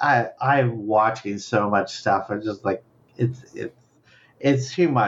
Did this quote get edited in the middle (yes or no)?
no